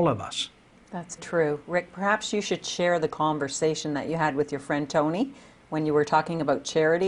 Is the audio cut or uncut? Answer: cut